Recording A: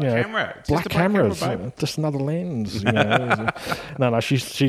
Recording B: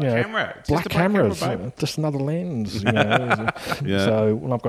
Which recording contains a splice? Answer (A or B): B